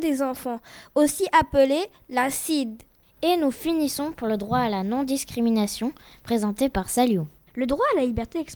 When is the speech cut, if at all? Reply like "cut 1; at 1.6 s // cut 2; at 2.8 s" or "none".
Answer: cut 1; at 3.0 s // cut 2; at 7.5 s